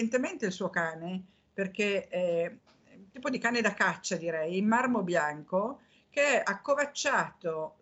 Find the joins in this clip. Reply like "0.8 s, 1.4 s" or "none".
none